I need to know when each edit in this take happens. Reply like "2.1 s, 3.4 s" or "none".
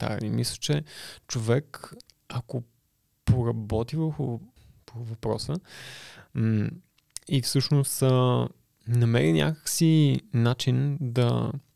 none

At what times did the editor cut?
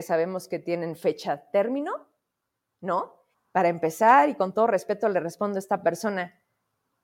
3.3 s

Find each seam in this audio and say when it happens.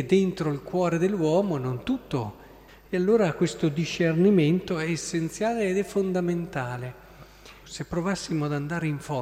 2.7 s, 7.6 s

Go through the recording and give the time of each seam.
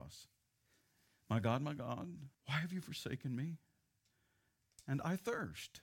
2.3 s

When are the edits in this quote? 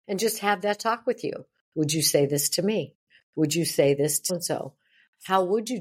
4.3 s

